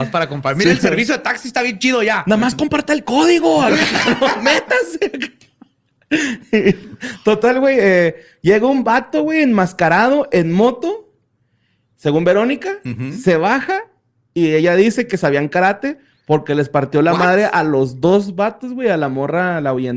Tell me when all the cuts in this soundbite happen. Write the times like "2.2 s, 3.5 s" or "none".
none